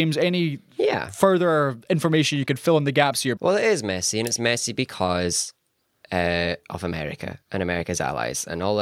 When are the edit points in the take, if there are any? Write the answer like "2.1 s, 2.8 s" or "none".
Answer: 3.4 s